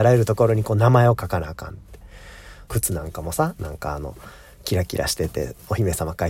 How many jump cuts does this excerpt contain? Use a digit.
1